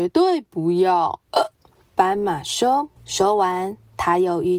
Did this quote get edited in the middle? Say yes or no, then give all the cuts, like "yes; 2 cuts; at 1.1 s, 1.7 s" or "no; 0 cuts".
yes; 1 cut; at 3.0 s